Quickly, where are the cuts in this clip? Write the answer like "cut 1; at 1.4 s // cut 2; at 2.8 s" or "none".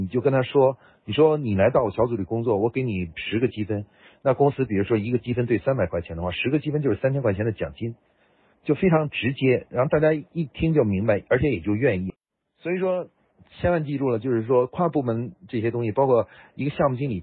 none